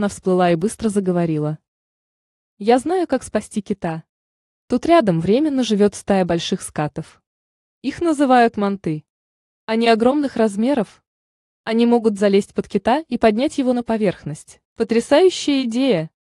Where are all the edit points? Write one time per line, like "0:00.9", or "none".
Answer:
0:14.7